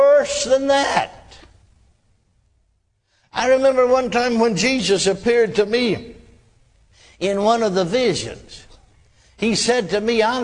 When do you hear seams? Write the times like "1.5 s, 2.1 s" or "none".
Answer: none